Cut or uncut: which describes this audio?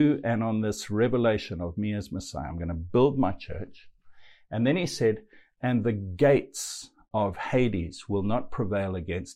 uncut